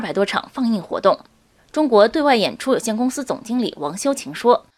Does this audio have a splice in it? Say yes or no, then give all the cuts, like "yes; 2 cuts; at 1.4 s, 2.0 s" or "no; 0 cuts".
yes; 1 cut; at 1.6 s